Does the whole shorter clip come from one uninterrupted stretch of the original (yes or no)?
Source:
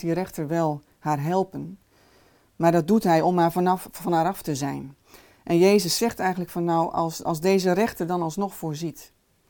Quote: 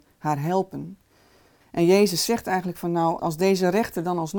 no